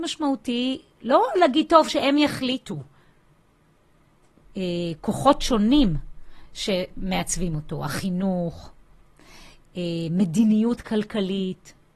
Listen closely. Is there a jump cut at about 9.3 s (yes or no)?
no